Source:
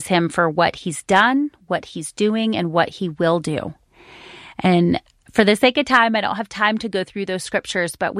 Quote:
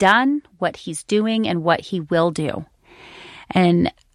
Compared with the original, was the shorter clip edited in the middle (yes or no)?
no